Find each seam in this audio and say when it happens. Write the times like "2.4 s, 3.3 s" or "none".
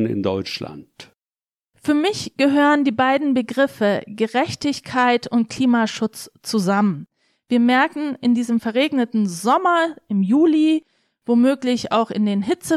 none